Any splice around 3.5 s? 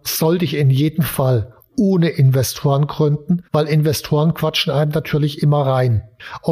yes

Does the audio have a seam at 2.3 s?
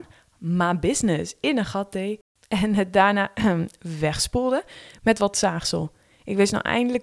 no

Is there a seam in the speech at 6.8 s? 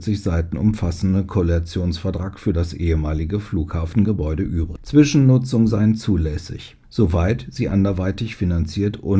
yes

